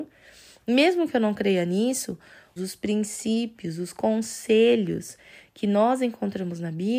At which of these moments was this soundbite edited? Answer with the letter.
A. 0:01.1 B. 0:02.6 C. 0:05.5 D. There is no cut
B